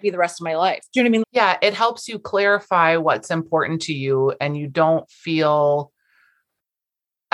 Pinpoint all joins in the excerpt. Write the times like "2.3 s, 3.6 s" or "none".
1.2 s

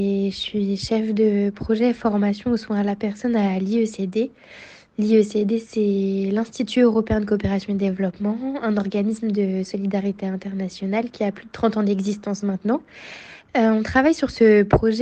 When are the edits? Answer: 13.5 s

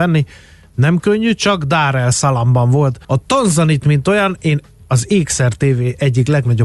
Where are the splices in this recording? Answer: 3.0 s

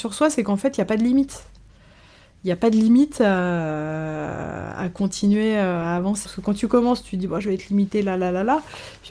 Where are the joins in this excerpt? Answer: 6.2 s

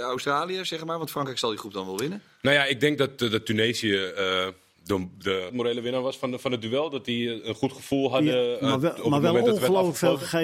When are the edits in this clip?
5.5 s

